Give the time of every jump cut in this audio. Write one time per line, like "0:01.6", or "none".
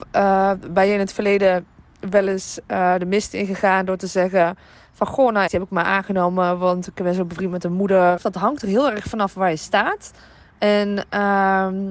0:05.5
0:08.2